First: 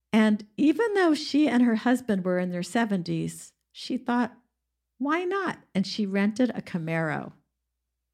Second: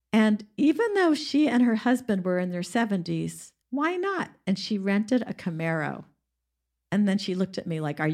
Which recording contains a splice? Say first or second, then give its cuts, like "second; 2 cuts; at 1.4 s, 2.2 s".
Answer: second; 2 cuts; at 3.6 s, 6.7 s